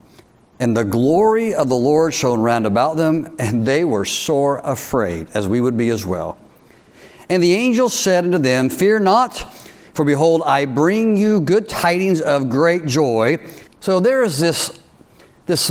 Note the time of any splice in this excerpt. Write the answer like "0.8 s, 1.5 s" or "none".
13.7 s